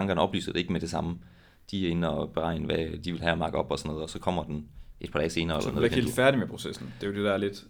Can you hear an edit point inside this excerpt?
no; 0 cuts

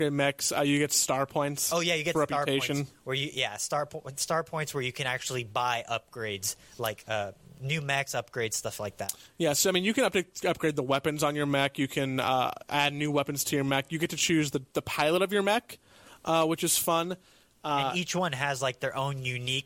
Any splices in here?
no; 0 cuts

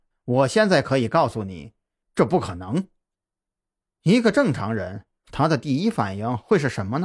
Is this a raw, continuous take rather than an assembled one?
no; 2 cuts; at 2.0 s, 5.2 s

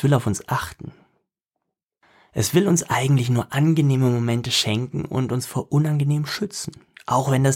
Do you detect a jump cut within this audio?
no; 0 cuts

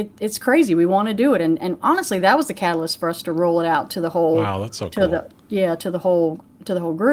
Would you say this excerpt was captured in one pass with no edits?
yes; 0 cuts

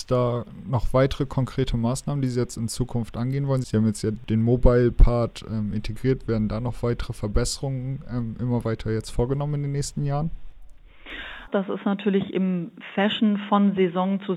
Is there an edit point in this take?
yes; 2 cuts; at 3.6 s, 11.5 s

